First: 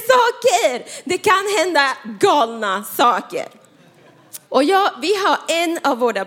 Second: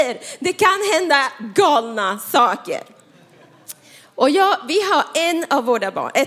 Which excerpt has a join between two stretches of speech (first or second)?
first